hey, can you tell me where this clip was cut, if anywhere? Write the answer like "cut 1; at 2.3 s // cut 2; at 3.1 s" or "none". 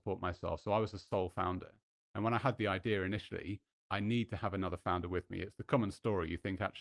cut 1; at 3.7 s